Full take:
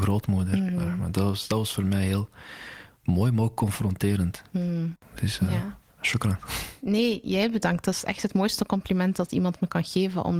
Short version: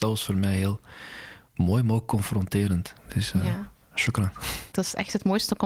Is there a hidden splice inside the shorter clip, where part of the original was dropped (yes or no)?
yes